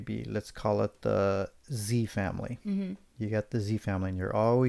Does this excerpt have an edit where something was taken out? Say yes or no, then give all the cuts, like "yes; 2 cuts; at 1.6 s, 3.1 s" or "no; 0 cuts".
no; 0 cuts